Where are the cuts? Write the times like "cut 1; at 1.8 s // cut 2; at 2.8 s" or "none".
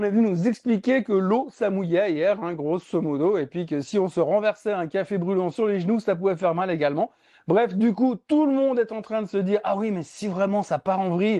none